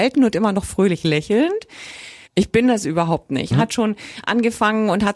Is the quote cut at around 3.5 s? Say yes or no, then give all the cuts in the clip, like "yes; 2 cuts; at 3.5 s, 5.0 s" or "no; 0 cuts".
yes; 2 cuts; at 2.3 s, 3.5 s